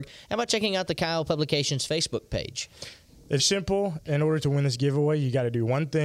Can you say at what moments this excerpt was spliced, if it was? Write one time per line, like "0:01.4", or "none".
0:03.4